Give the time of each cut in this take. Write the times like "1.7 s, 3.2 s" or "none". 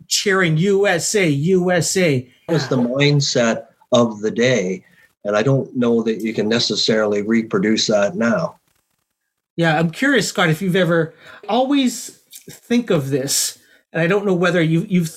2.5 s, 11.4 s